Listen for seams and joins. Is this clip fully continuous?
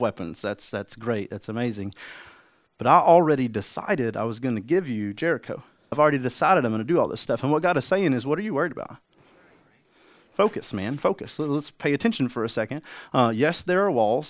no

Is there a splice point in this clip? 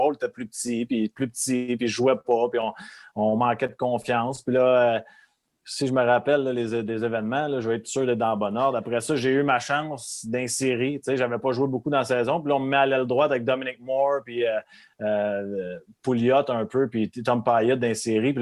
no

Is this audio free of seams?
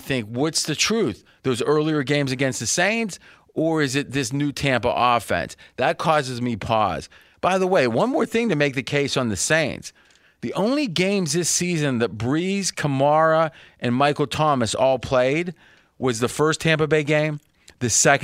yes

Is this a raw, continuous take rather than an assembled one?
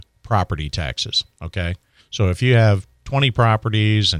no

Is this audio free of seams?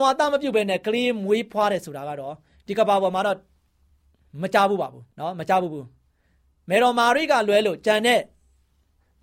no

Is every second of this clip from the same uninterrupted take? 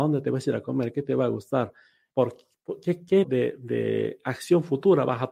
no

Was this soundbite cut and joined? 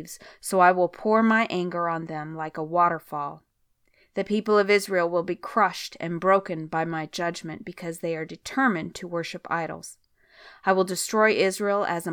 no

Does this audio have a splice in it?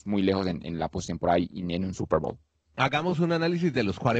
no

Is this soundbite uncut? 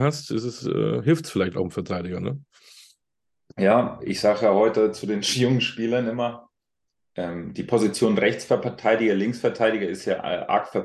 yes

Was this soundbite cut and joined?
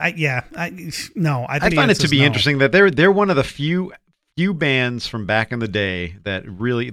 yes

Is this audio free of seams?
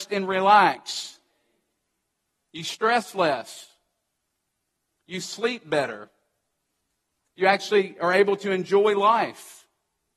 no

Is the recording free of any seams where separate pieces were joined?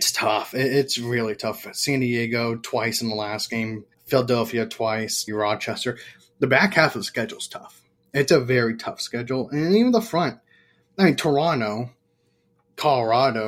no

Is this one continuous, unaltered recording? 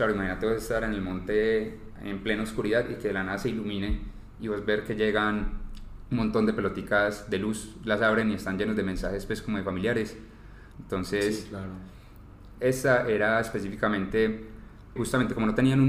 no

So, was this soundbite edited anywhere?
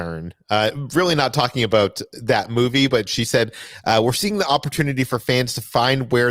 no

